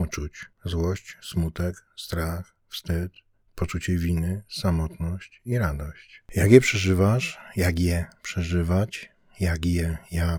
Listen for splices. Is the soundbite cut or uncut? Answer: uncut